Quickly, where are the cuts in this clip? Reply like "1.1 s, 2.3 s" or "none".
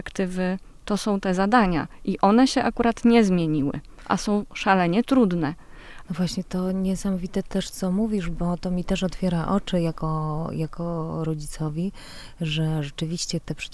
6.0 s